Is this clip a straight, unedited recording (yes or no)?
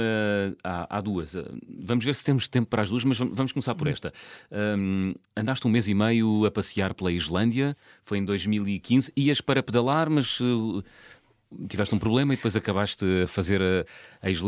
no